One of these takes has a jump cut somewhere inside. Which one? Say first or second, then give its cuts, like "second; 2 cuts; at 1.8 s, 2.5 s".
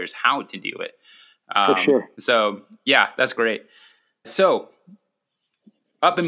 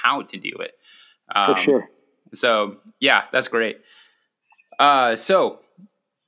first; 2 cuts; at 2.1 s, 4.2 s